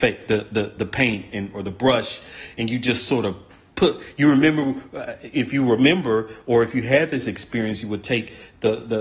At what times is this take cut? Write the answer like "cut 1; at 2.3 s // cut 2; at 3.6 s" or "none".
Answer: cut 1; at 1.5 s